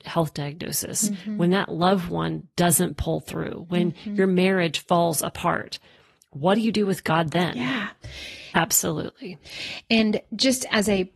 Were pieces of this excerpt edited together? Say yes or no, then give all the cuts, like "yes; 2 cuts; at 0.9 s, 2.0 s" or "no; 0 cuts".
yes; 1 cut; at 8.5 s